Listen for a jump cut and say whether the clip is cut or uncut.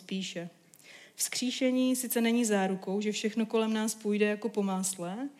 uncut